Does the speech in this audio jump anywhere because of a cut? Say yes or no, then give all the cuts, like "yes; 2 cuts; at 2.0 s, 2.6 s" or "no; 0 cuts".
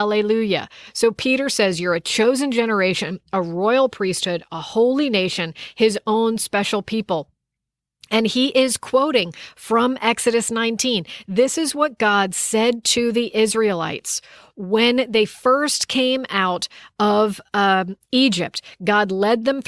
no; 0 cuts